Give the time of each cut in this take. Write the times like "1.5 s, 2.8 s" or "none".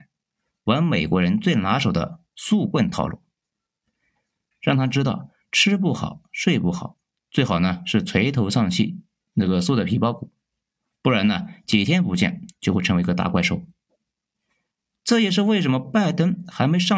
4.5 s